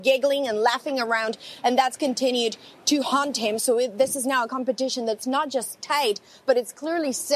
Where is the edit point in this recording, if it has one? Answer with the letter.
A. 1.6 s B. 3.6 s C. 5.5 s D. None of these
B